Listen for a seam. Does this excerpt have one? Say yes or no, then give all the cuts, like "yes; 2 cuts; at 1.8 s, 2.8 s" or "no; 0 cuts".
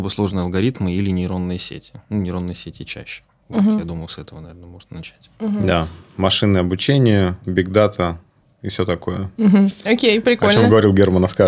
no; 0 cuts